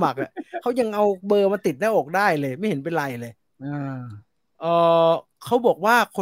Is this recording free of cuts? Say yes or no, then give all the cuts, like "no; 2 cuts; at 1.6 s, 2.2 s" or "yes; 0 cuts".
yes; 0 cuts